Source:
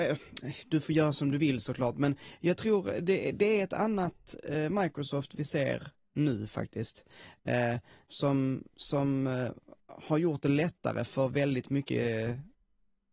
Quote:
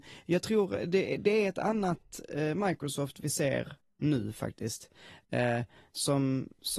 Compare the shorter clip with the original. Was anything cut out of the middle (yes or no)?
no